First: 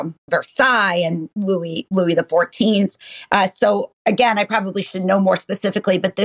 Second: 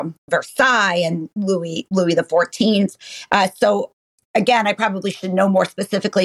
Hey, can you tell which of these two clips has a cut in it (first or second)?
first